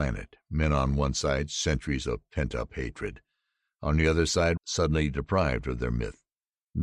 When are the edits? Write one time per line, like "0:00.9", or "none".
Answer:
0:04.6